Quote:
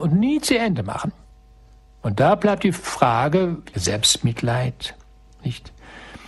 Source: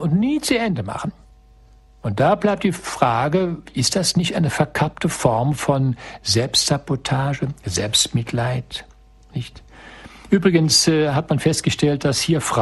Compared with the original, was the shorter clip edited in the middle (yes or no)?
yes